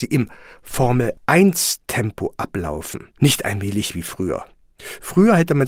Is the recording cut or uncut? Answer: uncut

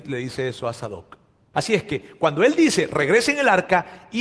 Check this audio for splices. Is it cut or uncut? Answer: cut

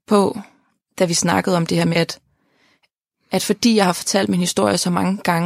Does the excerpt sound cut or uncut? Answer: cut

